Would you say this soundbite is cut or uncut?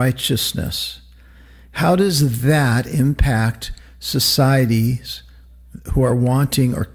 uncut